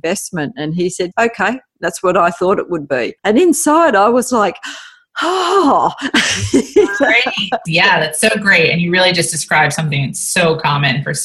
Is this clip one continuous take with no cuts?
no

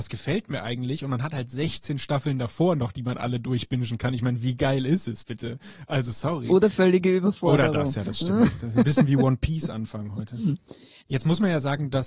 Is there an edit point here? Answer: no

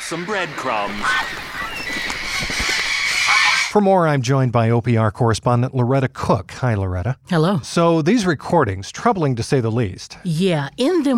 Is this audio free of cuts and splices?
yes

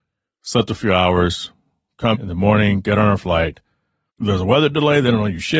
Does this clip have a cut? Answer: yes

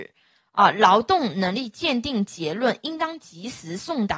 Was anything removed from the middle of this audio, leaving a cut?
no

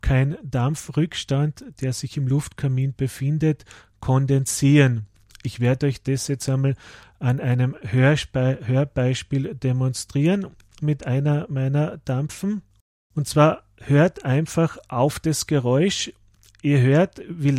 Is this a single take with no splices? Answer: yes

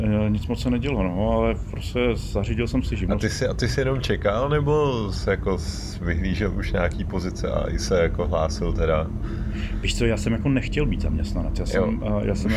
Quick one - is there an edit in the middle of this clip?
no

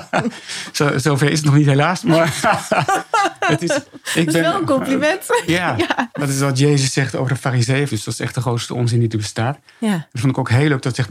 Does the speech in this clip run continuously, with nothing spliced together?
no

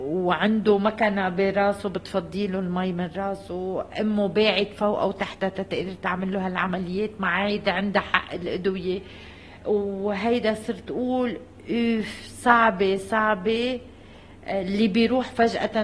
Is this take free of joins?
yes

